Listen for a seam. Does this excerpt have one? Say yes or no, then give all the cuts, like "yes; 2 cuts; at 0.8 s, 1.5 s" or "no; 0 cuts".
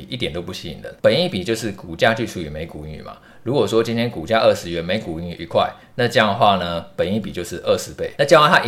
yes; 1 cut; at 1.0 s